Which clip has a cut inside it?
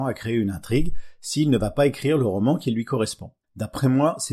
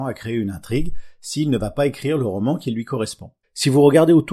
second; 1 cut; at 3.4 s

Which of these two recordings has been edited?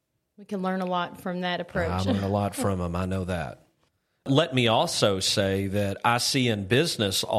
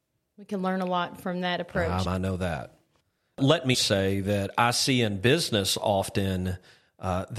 second; 2 cuts; at 2.0 s, 3.7 s

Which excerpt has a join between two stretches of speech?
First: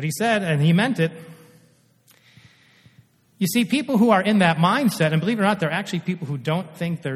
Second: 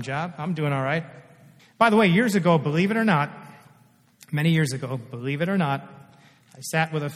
second; 1 cut; at 1.6 s

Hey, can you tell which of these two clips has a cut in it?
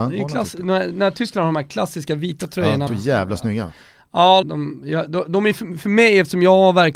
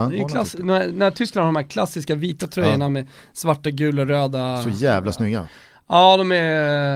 first; 2 cuts; at 2.9 s, 4.4 s

